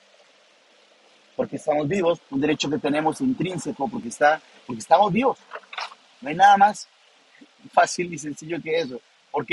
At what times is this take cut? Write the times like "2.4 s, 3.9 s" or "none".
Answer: 2.2 s